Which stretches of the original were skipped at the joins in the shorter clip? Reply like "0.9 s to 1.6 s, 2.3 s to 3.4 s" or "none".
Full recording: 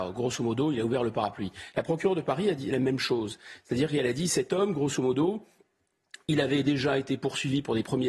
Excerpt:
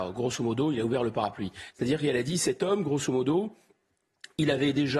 1.7 s to 3.6 s